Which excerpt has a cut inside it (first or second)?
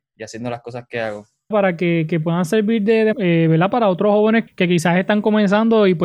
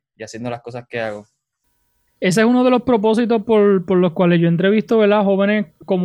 first